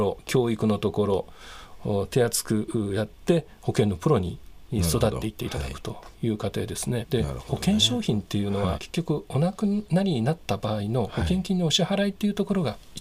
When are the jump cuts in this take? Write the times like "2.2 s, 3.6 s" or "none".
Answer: 7.0 s, 8.7 s